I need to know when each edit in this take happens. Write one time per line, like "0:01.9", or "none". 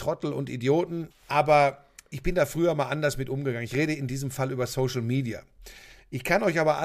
0:01.1